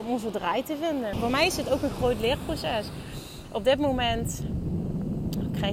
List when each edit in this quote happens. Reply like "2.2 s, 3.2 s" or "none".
1.1 s